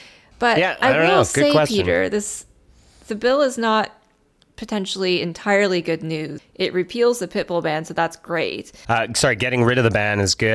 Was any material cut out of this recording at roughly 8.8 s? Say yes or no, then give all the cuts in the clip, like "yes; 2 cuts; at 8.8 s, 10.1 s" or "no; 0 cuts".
yes; 2 cuts; at 6.4 s, 8.8 s